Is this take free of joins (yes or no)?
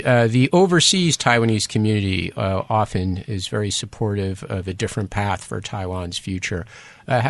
yes